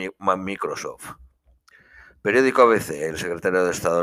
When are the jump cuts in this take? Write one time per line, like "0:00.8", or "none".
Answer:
none